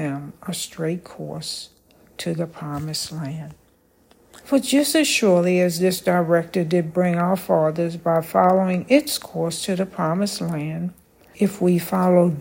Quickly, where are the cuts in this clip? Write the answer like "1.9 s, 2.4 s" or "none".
4.4 s, 11.3 s